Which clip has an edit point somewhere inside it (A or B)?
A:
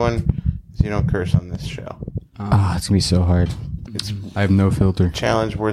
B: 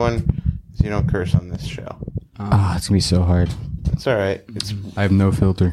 A